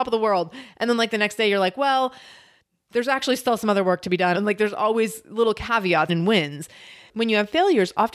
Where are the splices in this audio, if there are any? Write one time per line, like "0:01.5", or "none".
0:04.3
0:06.1

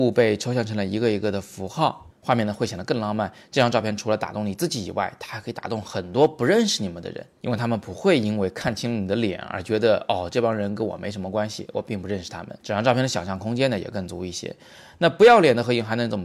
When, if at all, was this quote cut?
0:12.6

